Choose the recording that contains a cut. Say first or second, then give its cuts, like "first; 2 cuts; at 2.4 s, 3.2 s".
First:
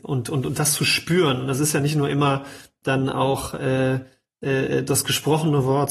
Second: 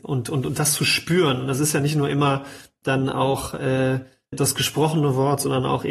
second; 1 cut; at 4.3 s